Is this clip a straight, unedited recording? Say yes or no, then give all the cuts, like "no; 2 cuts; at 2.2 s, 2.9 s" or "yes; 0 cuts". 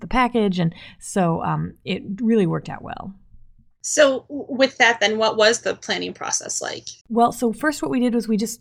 no; 1 cut; at 7.0 s